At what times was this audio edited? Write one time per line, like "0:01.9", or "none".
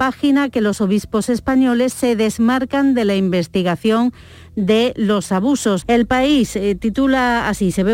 0:05.8